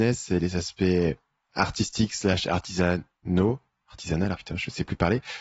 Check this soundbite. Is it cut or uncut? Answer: cut